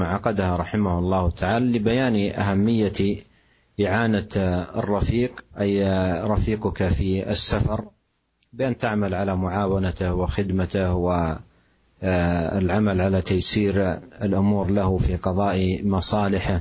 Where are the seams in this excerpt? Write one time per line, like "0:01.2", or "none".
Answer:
0:05.5